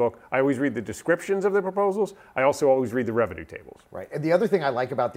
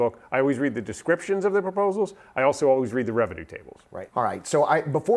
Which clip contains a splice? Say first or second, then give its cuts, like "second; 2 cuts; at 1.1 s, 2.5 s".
second; 1 cut; at 4.1 s